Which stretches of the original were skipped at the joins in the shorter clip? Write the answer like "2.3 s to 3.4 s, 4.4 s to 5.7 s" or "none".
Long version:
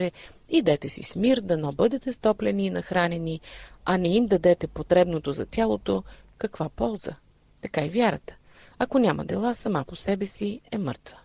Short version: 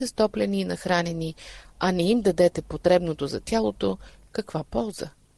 none